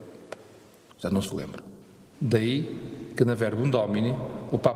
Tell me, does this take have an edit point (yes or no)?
yes